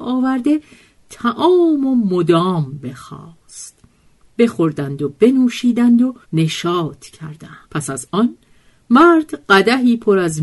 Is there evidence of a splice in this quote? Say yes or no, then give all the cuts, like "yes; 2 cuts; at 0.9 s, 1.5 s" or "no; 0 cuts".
yes; 2 cuts; at 6.2 s, 7.6 s